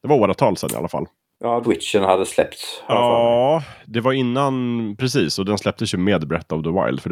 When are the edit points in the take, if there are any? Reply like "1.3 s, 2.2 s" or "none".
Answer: 1.6 s